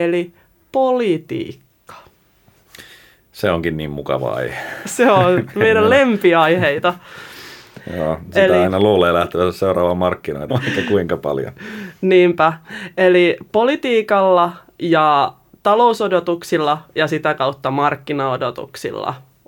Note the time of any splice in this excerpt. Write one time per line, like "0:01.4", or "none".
0:10.5